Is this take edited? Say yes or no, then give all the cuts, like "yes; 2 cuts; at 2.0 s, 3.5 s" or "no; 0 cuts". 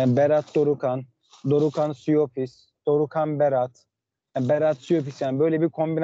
no; 0 cuts